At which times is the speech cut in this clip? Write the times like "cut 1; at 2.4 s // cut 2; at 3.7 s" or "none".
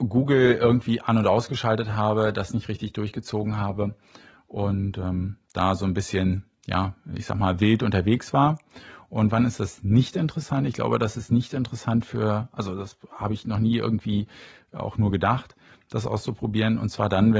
none